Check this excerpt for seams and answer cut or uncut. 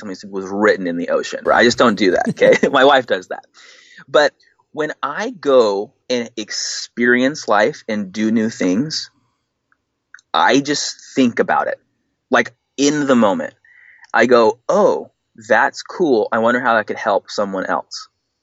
cut